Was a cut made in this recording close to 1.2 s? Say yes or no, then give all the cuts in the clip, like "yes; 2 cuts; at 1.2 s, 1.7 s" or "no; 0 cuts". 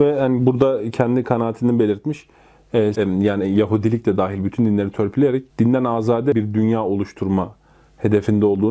no; 2 cuts; at 2.9 s, 5.5 s